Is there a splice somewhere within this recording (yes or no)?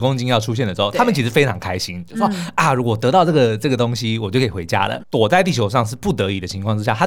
yes